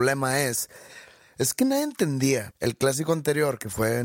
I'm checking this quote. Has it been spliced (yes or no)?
yes